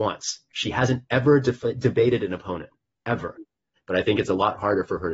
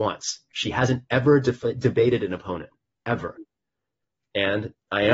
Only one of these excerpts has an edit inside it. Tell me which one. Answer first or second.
first